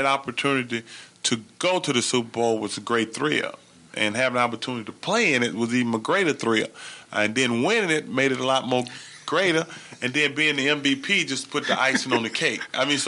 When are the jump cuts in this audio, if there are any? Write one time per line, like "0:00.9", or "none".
none